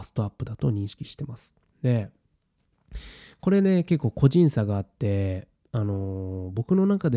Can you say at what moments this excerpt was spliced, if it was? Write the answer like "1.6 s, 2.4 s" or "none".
1.7 s